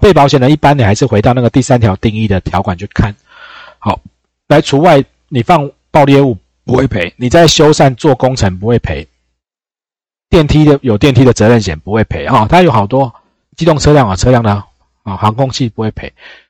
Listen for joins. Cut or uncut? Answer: uncut